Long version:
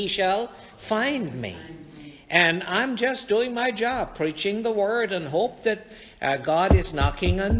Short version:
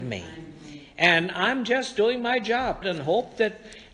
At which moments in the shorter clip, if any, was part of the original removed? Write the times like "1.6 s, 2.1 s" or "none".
2.8 s

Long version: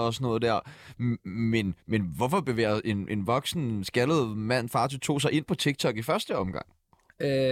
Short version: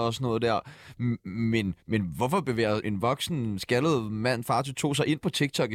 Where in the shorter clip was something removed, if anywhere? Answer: 2.8 s

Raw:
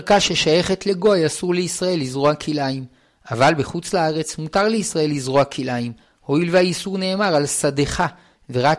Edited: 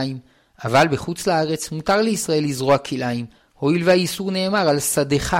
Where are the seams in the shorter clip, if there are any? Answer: none

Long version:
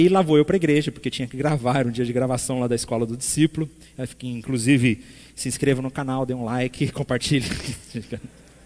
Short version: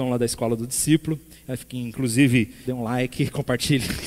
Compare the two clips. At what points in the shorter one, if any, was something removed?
2.6 s

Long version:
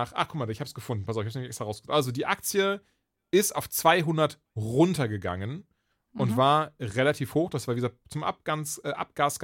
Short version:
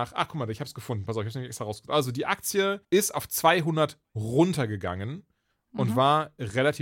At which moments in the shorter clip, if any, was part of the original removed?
2.8 s

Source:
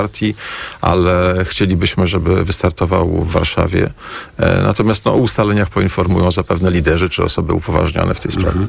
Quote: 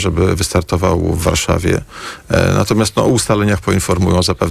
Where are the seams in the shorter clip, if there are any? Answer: none

